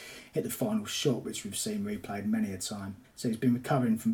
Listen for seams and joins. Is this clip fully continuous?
no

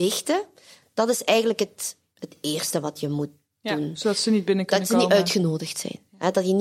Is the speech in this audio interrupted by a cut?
no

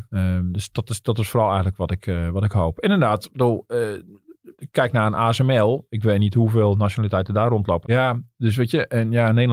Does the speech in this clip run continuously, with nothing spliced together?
no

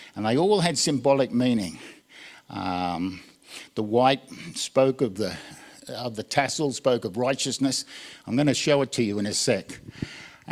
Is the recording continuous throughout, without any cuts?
yes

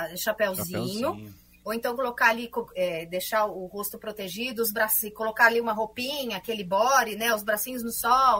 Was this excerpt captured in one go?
no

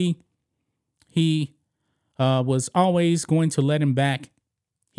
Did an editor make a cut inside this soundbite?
no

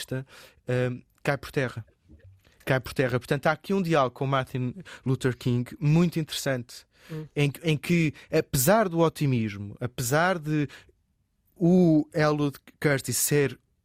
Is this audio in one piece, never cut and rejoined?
yes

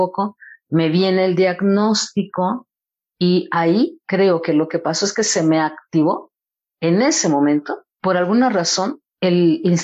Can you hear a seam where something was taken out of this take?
no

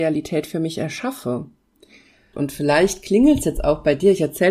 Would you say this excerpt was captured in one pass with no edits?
no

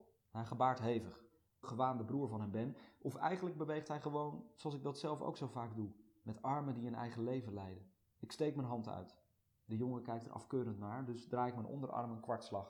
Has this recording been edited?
yes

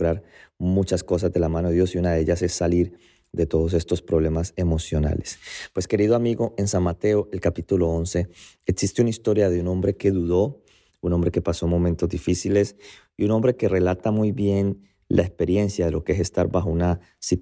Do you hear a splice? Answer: no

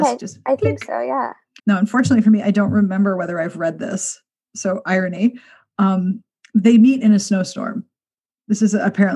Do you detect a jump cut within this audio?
yes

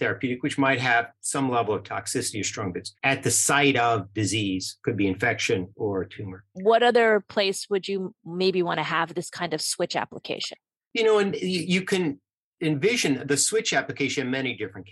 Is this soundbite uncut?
no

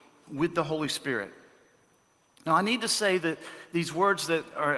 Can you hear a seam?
no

